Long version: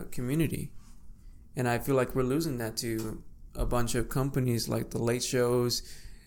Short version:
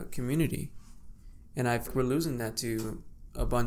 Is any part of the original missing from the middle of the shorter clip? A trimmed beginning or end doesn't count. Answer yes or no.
yes